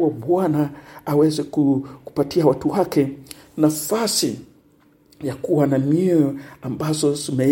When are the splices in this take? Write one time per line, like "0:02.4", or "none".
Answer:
none